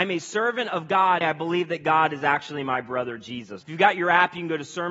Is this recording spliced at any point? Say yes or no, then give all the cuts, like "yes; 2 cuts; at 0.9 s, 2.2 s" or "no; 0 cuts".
yes; 2 cuts; at 1.2 s, 3.6 s